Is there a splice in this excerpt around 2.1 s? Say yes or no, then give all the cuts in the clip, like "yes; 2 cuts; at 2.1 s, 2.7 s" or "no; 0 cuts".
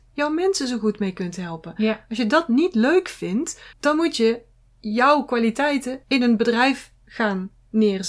no; 2 cuts; at 3.7 s, 6.0 s